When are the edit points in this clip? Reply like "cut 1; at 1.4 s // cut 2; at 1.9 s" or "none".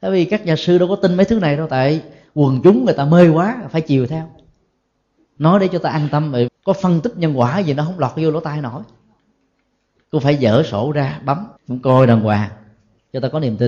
cut 1; at 6.5 s // cut 2; at 11.6 s